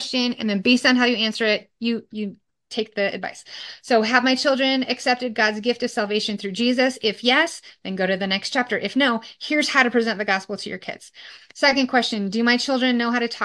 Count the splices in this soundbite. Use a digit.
0